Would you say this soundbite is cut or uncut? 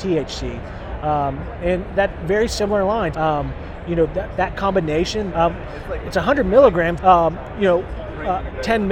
cut